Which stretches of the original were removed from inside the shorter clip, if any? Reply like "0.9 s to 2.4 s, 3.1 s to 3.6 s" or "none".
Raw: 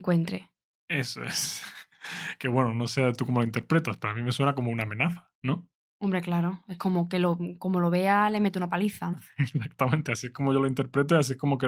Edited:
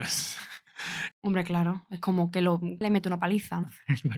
2.4 s to 5.9 s, 7.6 s to 8.3 s